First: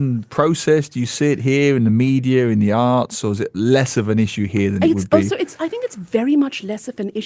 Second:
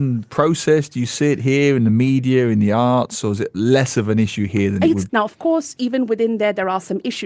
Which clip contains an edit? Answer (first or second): second